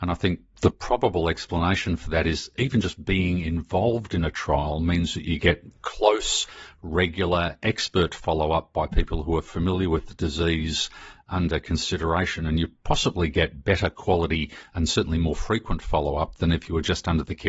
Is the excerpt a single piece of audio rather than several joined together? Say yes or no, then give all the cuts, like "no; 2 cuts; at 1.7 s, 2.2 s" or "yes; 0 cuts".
yes; 0 cuts